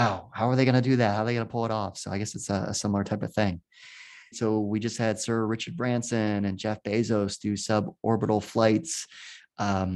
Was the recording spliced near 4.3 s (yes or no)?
yes